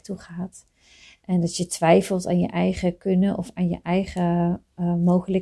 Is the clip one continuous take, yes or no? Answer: yes